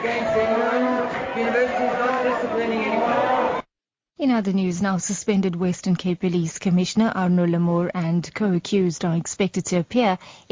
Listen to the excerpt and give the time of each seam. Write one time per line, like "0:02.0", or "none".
none

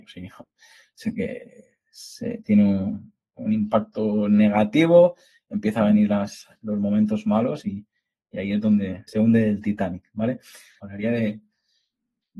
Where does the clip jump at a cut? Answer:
0:09.1
0:10.8

